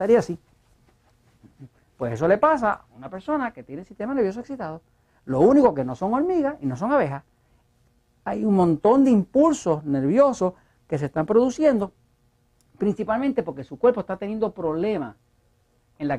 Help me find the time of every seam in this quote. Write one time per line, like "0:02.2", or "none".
none